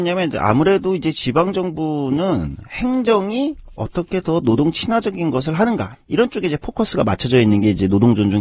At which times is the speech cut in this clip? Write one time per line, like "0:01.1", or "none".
0:05.9